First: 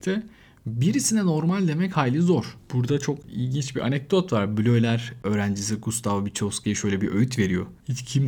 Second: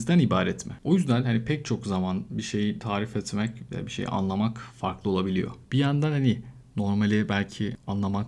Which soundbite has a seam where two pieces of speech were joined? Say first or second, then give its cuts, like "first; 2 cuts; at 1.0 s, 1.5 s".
second; 1 cut; at 5.6 s